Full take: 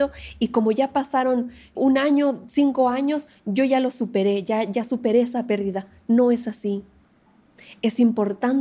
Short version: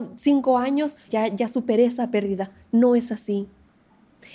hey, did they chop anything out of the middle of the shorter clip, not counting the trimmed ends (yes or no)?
yes